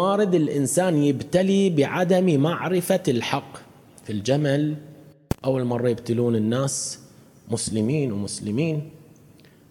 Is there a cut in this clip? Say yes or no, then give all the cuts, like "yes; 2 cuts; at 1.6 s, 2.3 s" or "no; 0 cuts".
no; 0 cuts